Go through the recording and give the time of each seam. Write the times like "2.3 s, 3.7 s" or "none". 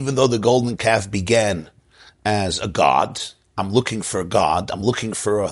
none